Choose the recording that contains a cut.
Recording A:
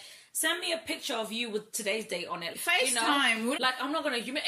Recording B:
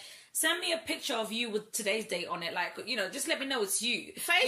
A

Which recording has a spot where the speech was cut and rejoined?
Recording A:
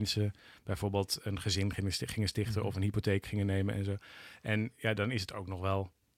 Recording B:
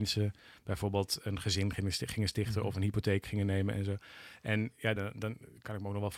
B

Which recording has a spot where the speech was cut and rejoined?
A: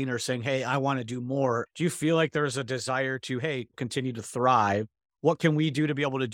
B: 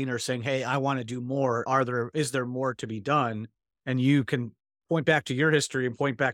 A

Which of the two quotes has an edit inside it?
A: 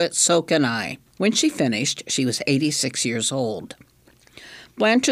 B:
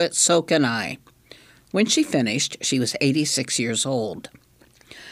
A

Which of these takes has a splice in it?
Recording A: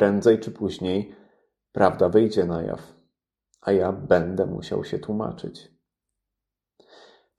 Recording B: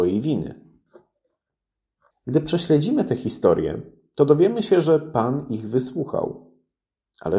B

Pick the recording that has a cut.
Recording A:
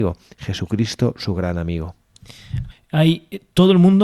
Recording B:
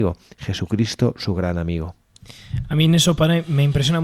A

